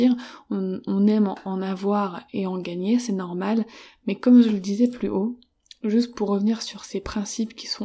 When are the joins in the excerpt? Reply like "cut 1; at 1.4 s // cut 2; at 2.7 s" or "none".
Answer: none

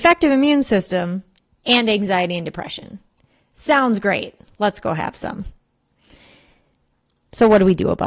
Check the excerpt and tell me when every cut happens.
none

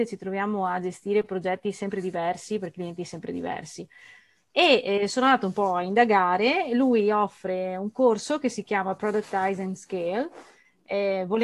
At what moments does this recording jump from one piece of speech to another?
none

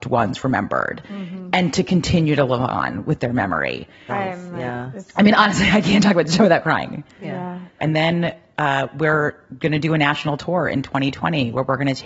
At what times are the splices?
cut 1; at 4.1 s // cut 2; at 7.8 s

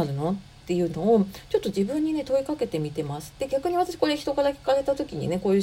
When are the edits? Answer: none

